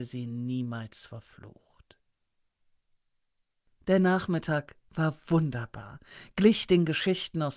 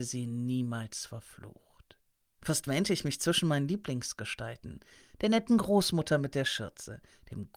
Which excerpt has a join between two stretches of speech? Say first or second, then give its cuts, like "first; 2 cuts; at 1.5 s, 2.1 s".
second; 1 cut; at 2.4 s